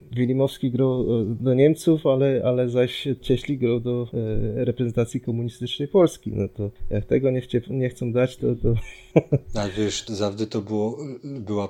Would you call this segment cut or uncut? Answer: cut